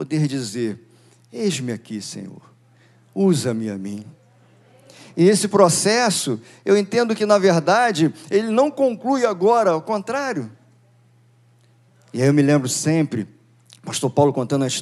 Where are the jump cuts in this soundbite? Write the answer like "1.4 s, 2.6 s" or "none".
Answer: 11.9 s